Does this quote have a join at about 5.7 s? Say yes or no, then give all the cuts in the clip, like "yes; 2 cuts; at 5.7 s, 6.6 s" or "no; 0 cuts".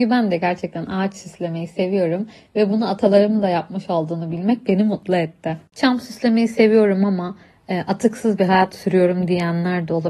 no; 0 cuts